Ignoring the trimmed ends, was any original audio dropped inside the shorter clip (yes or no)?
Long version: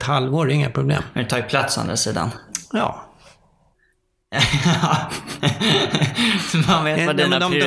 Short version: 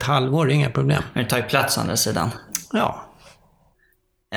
no